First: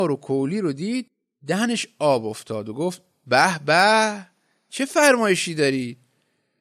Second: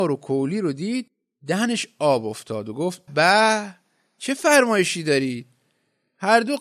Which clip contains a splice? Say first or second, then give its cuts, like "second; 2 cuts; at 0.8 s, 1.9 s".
second; 1 cut; at 3.1 s